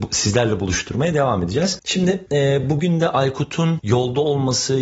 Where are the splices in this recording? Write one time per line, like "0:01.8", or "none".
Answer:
none